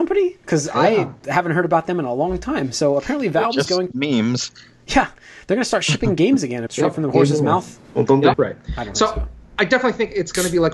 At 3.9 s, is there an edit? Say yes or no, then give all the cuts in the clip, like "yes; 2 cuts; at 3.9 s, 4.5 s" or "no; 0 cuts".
yes; 3 cuts; at 3.9 s, 6.7 s, 8.3 s